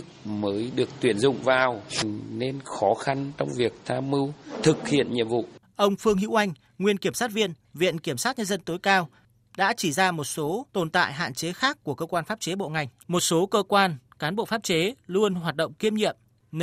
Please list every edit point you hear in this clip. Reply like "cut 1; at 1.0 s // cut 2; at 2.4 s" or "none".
cut 1; at 13.0 s